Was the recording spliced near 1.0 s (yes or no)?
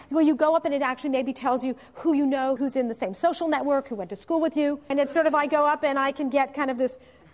no